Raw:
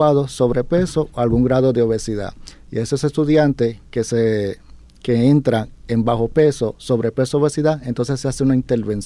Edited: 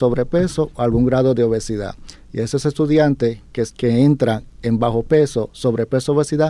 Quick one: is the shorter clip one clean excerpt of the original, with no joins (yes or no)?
no